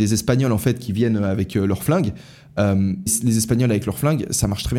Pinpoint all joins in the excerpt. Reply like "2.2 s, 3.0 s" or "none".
3.1 s

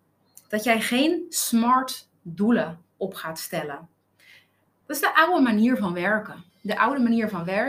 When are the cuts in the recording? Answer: 6.5 s

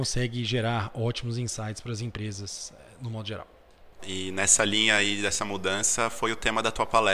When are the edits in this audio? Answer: 4.0 s

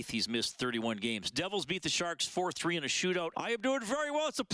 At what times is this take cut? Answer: 3.3 s

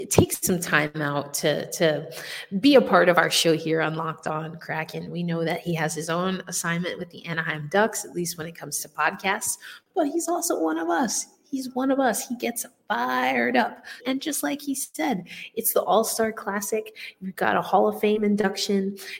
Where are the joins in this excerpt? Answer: 14.0 s

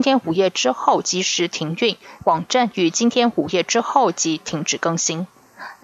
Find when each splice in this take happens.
2.2 s

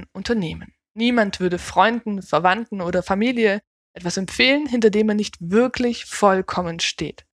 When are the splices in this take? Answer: none

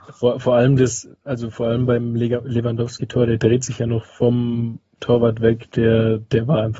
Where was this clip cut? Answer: none

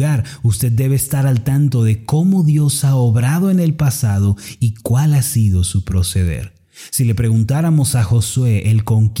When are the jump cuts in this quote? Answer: none

